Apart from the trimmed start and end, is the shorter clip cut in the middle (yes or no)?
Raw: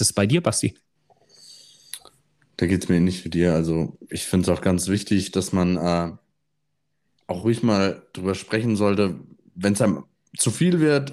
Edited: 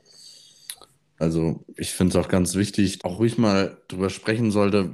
yes